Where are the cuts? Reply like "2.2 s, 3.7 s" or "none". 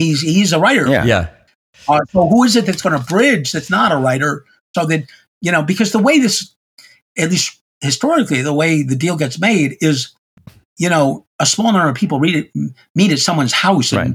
4.7 s